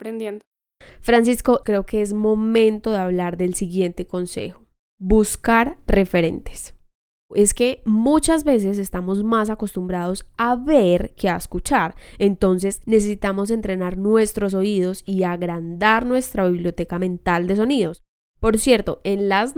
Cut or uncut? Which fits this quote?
cut